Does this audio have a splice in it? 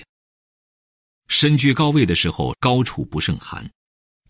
no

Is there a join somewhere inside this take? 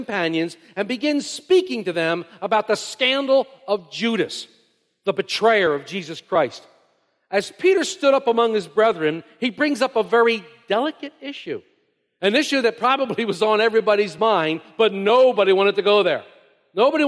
no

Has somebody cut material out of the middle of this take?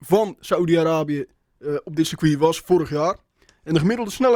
no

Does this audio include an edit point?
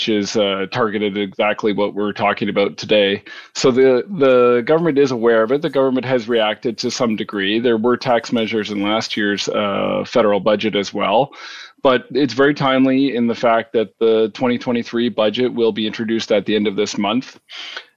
no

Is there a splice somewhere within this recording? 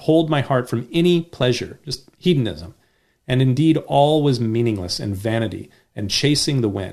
no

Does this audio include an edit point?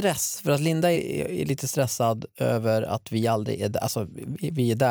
yes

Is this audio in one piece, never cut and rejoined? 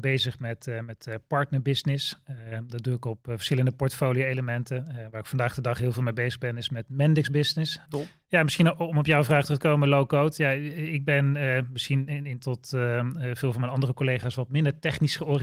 no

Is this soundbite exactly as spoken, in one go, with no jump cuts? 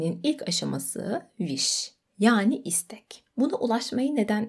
yes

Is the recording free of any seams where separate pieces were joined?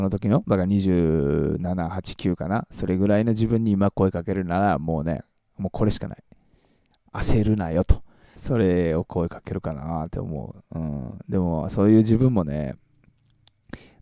no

